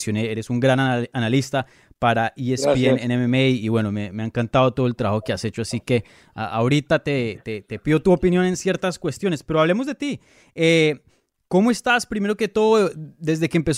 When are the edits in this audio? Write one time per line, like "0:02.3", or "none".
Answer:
none